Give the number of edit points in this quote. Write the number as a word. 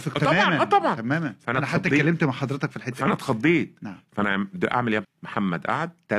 one